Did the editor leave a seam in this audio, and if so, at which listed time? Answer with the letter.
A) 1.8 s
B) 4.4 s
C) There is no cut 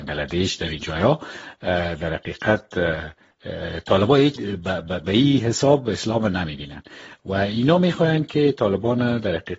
B